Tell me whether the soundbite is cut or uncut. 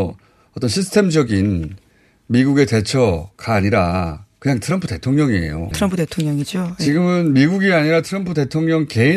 cut